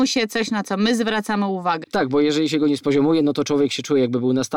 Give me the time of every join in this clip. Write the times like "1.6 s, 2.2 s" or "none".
1.8 s